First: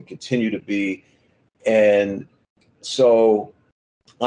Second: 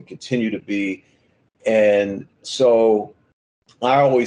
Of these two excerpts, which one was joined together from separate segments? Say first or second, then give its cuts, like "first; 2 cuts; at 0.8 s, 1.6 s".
second; 1 cut; at 2.3 s